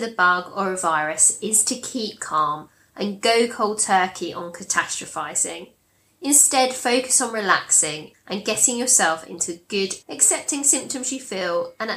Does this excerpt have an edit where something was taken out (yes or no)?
yes